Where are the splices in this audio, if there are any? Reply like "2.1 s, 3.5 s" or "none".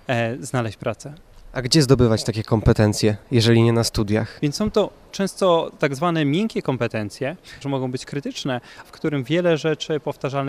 4.4 s, 7.6 s, 8.8 s